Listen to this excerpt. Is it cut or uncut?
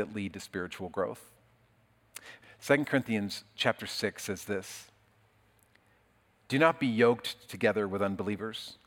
cut